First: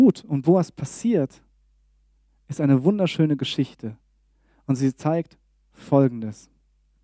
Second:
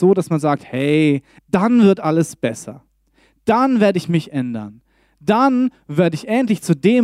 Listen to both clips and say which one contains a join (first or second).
second